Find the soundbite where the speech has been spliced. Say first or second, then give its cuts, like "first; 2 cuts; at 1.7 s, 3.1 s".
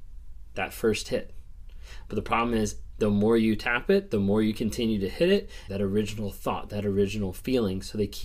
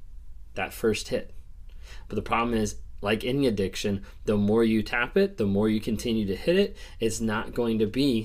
first; 2 cuts; at 2.9 s, 5.7 s